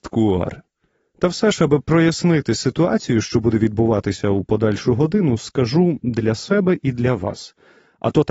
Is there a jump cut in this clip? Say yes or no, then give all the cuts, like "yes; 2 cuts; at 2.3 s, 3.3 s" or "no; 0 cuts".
no; 0 cuts